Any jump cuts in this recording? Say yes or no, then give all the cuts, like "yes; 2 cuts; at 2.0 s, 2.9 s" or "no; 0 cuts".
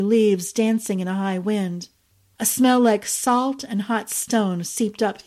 no; 0 cuts